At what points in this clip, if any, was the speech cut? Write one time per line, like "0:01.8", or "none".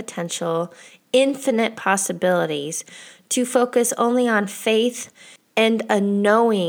none